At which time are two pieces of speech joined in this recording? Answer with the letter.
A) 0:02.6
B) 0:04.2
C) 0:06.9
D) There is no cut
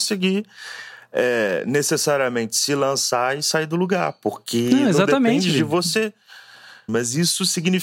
C